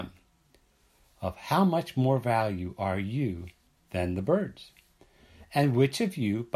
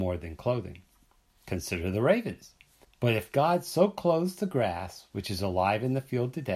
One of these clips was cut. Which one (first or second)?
second